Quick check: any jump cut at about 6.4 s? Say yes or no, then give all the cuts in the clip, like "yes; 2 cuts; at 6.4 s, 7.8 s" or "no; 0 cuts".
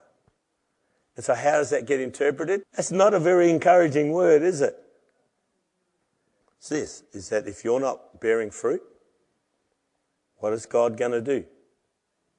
yes; 3 cuts; at 2.6 s, 6.4 s, 10.2 s